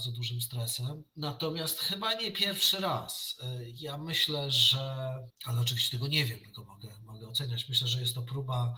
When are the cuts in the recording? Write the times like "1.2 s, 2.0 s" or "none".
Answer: none